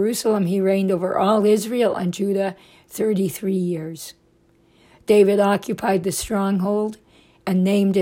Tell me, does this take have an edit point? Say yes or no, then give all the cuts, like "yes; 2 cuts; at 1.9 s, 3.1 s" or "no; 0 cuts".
no; 0 cuts